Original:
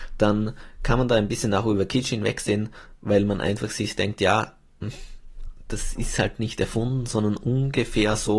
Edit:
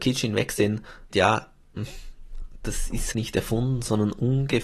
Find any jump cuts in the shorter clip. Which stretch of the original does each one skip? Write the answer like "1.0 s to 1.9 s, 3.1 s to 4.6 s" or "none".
3.0 s to 4.2 s, 6.2 s to 6.4 s